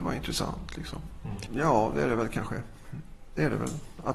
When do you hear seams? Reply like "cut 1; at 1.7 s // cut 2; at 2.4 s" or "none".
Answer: cut 1; at 1.5 s

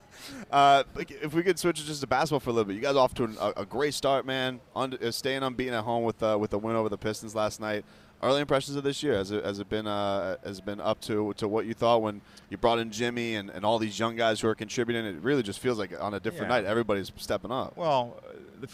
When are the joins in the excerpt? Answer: none

